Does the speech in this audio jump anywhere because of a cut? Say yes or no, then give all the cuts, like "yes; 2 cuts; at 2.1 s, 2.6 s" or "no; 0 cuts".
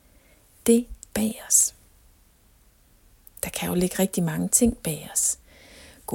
yes; 1 cut; at 1.1 s